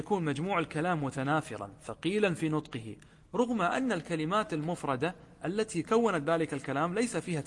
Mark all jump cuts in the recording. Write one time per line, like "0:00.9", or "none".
0:05.8